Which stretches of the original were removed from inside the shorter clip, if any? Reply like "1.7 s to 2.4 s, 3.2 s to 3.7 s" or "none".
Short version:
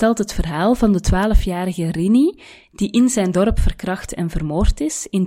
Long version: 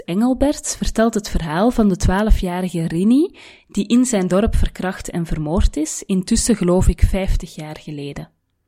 none